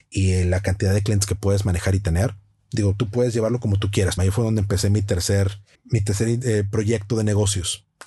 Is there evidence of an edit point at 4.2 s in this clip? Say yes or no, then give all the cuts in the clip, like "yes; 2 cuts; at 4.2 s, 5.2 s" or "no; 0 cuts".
yes; 2 cuts; at 4.2 s, 5.7 s